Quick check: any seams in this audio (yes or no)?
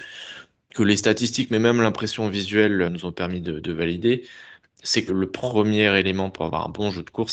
yes